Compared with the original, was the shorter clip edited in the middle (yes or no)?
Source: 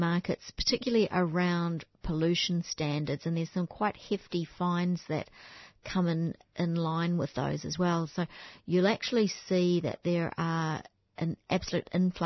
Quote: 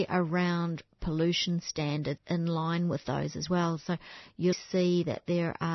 yes